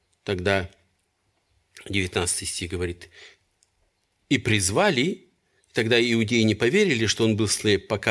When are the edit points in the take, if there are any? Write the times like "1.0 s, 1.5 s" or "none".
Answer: 4.2 s